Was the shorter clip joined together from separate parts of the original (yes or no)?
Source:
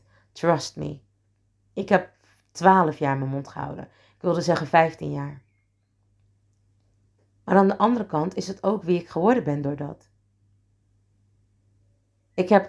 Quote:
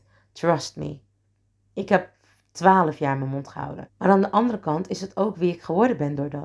yes